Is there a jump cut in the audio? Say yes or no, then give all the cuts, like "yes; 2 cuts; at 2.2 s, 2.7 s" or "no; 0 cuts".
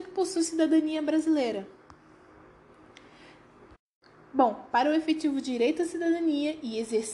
no; 0 cuts